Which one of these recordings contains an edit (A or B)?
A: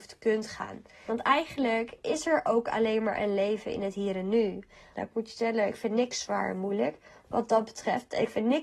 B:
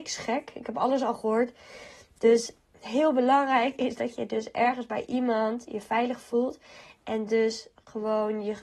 A